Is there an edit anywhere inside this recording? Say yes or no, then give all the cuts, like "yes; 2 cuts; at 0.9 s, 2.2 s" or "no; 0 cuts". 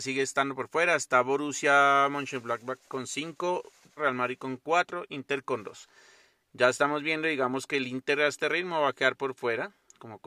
yes; 1 cut; at 4.0 s